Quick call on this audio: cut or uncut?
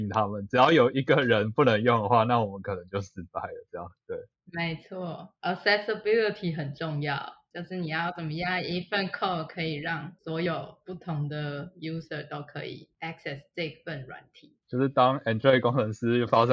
uncut